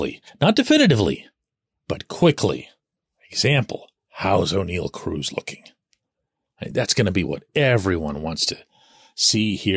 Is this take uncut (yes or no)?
yes